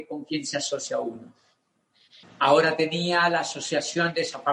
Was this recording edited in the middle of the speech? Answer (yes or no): yes